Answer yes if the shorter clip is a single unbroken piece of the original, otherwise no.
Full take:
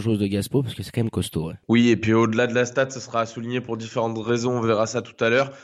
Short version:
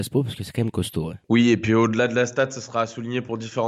yes